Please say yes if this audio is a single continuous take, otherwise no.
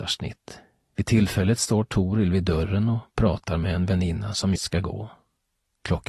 no